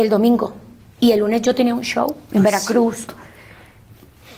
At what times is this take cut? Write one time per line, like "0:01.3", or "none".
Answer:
none